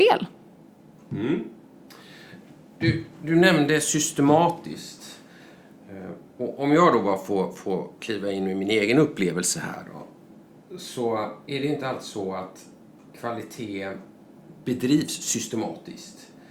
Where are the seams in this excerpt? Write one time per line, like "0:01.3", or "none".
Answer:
none